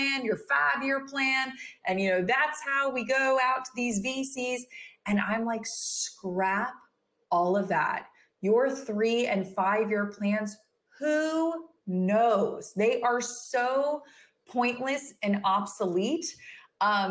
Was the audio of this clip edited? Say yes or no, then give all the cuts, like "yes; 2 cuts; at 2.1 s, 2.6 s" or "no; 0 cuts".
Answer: no; 0 cuts